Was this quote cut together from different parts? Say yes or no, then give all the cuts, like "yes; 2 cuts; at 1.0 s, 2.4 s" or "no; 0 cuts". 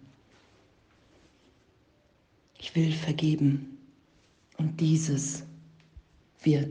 no; 0 cuts